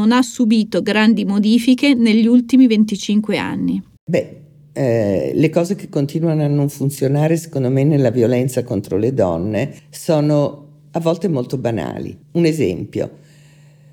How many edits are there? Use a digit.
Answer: 3